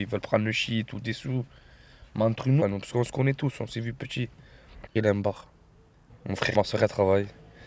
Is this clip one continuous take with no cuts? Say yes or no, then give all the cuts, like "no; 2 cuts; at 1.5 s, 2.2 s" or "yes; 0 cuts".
no; 3 cuts; at 2.6 s, 4.9 s, 6.5 s